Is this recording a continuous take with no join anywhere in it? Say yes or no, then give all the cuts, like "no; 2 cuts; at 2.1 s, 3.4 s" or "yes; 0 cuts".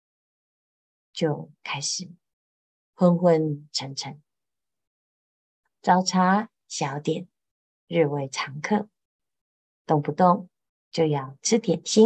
yes; 0 cuts